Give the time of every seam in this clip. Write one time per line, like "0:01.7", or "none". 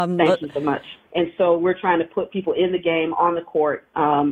0:01.1